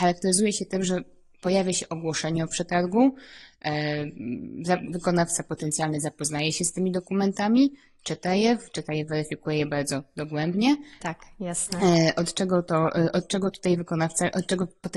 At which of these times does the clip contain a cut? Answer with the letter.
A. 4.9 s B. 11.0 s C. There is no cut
B